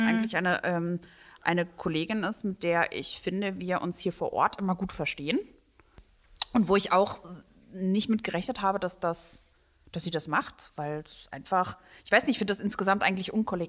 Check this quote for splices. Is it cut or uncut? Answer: uncut